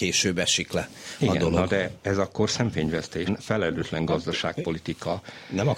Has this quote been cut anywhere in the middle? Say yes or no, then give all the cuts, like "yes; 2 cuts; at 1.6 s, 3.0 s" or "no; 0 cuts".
yes; 1 cut; at 3.3 s